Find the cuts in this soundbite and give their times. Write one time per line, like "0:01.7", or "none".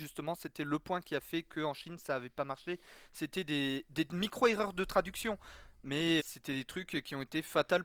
0:06.2